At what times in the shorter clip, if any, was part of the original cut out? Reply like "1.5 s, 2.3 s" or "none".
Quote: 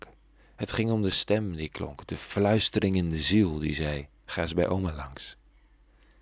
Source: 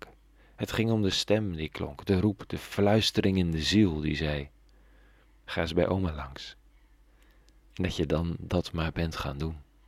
2.0 s, 4.2 s